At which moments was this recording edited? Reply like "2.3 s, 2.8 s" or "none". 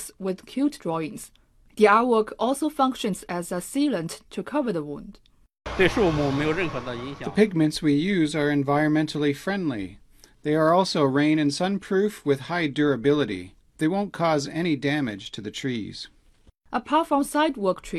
none